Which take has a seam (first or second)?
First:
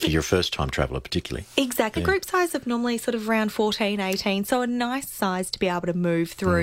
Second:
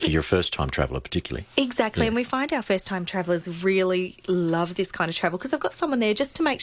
first